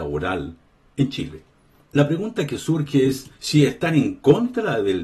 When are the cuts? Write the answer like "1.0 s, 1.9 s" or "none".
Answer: 1.9 s, 3.4 s